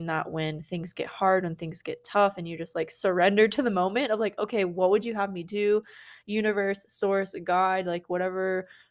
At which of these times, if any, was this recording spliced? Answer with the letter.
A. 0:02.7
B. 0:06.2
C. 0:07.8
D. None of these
D